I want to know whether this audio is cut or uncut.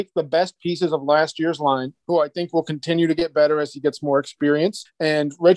cut